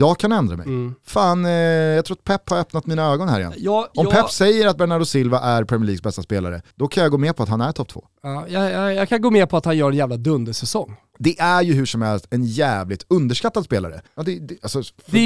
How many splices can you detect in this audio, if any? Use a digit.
2